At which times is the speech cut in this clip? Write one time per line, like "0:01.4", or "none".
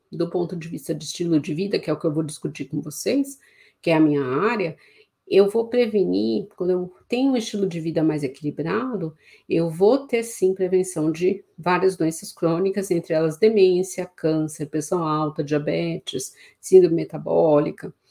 none